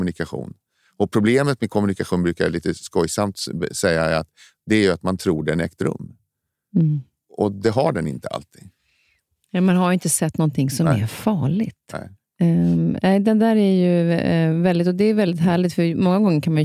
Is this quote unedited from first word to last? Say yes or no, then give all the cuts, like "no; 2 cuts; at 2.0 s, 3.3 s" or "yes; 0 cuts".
yes; 0 cuts